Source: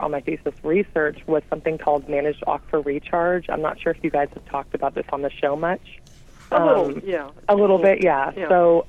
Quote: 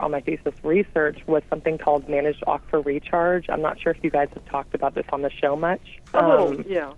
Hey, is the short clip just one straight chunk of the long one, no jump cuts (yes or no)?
no